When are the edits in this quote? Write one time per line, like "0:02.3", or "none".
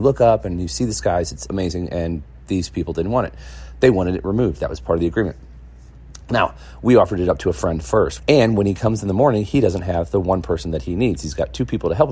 0:08.2